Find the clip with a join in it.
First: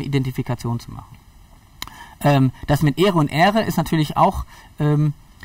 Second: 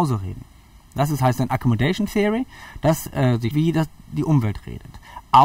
second; 1 cut; at 3.5 s

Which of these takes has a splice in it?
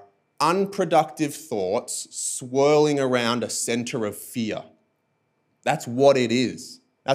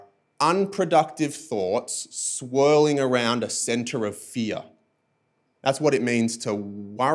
second; 1 cut; at 5.5 s

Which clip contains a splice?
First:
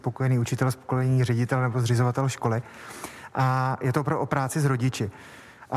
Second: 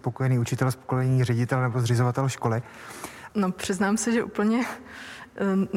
second; 1 cut; at 3.3 s

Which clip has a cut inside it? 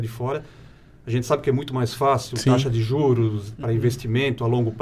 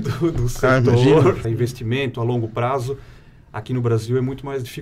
second; 1 cut; at 1.4 s

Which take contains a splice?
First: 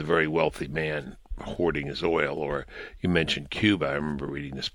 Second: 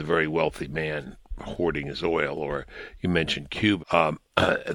second; 1 cut; at 3.8 s

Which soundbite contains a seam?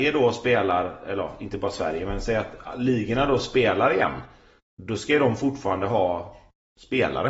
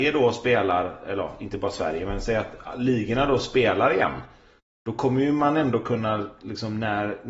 first; 1 cut; at 4.7 s

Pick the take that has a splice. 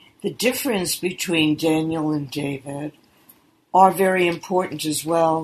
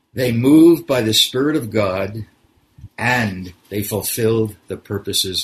second; 1 cut; at 2.9 s

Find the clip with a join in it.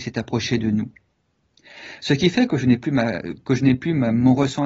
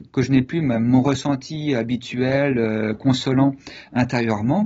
first; 1 cut; at 2.0 s

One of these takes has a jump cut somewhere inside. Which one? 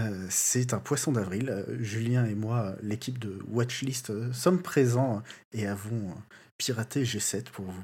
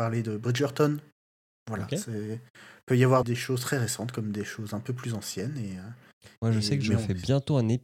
second; 1 cut; at 3.2 s

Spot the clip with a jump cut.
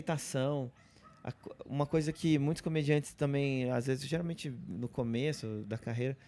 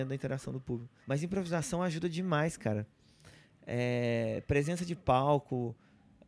second; 1 cut; at 1.0 s

